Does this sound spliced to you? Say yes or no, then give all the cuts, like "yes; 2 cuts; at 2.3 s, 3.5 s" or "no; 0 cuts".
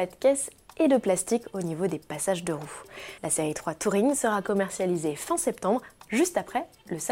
yes; 1 cut; at 3.2 s